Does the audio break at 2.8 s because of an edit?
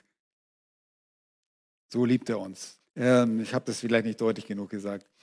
yes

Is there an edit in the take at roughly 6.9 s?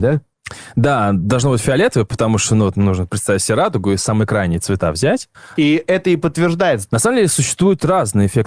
yes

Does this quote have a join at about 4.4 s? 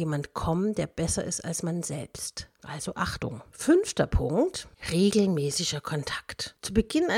no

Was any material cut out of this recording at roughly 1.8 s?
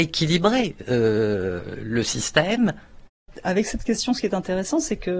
yes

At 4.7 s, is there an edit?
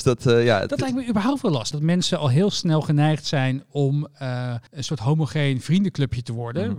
yes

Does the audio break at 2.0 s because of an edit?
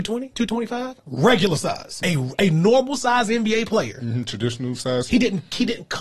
yes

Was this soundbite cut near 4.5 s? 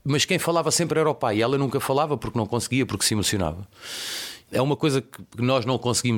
yes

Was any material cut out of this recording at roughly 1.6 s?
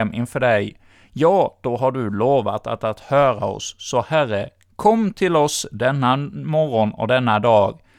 no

